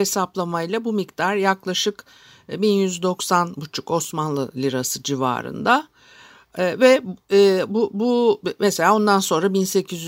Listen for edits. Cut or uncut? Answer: uncut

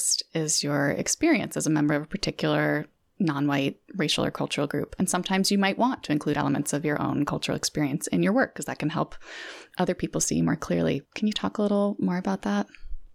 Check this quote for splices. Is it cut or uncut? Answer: cut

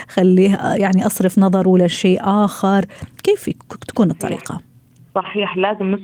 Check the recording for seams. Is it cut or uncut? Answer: uncut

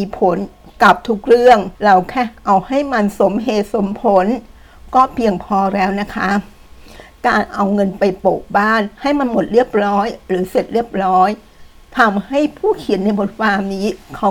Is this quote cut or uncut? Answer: cut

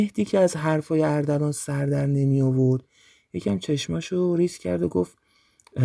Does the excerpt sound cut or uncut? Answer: uncut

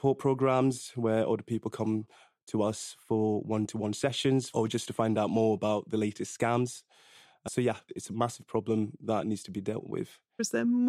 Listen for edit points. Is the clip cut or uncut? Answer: cut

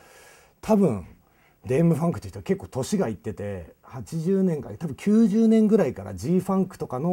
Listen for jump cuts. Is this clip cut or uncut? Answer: uncut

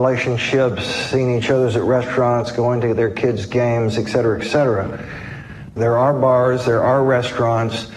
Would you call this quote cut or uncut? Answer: cut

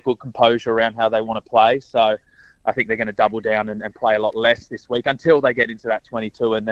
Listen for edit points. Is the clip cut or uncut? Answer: uncut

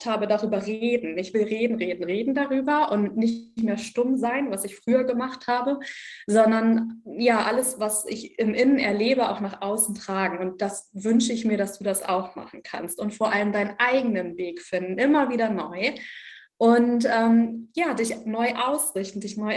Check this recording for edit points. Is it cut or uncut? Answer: uncut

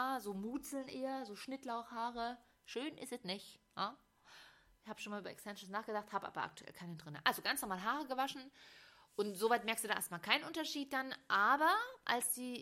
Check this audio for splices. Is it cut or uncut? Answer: uncut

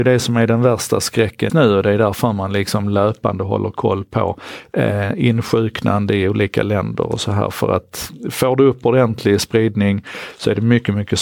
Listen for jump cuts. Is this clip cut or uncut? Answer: cut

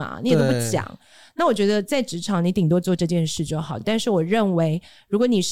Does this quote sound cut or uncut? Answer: uncut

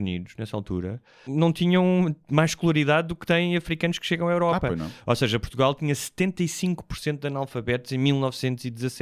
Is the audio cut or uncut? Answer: cut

